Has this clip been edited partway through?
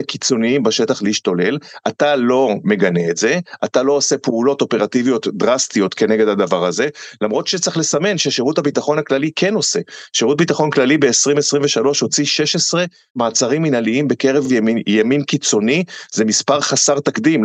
no; 0 cuts

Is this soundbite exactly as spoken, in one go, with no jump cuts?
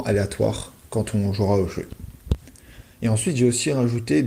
yes; 0 cuts

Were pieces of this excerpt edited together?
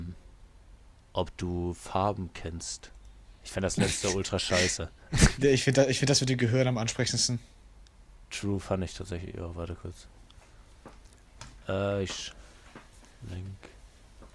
no; 0 cuts

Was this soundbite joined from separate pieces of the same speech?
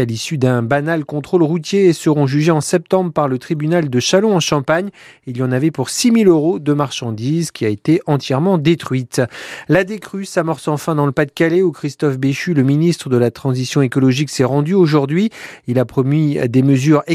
no; 0 cuts

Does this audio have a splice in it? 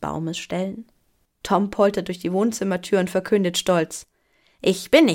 yes; 1 cut; at 1.2 s

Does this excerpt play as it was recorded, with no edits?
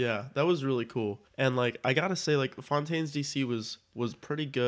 no; 1 cut; at 1.3 s

